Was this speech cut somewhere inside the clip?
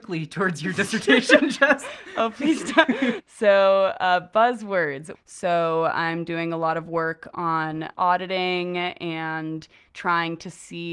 yes; 3 cuts; at 3.2 s, 5.1 s, 7.9 s

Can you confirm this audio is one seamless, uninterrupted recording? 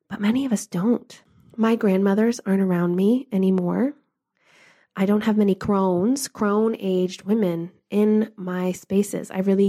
yes; 0 cuts

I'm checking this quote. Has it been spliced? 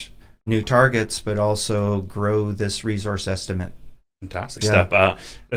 yes; 1 cut; at 4.6 s

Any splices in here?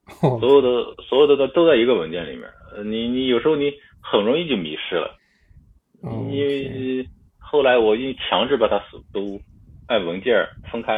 no; 0 cuts

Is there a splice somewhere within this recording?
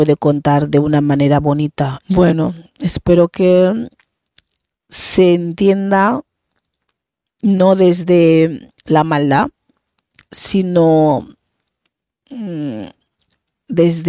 yes; 2 cuts; at 2.0 s, 8.8 s

